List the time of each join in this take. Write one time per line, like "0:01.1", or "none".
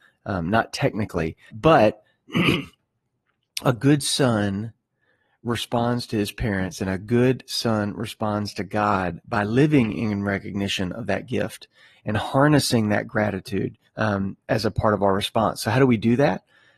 0:01.5
0:13.9